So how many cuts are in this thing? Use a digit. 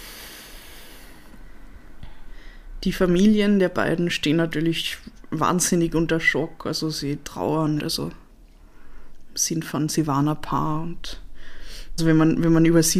2